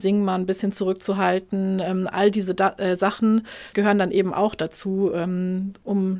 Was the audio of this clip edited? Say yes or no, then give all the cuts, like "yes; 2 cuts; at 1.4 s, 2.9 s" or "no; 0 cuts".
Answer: yes; 1 cut; at 3.7 s